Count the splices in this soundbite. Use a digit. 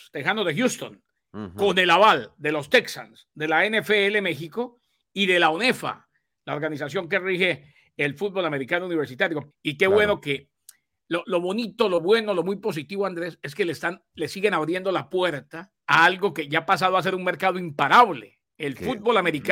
3